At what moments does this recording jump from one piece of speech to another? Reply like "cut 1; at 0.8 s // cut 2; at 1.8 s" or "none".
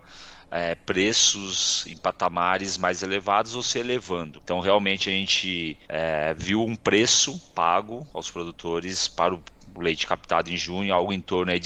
cut 1; at 4.4 s // cut 2; at 5.8 s